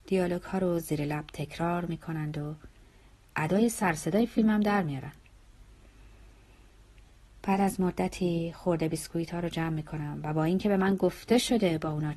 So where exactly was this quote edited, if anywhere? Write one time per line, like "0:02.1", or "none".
none